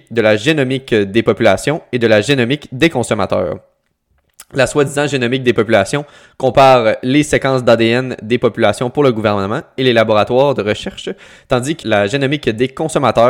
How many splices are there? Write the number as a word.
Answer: one